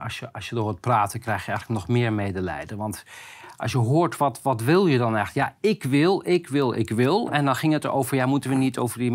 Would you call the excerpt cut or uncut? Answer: uncut